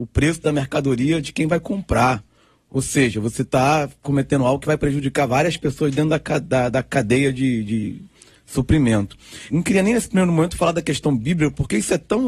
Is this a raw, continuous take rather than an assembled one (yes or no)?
no